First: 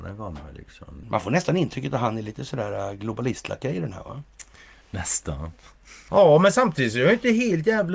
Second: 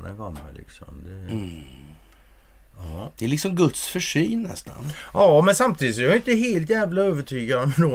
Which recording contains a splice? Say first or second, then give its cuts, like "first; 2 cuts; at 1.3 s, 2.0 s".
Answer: first; 2 cuts; at 1.0 s, 6.1 s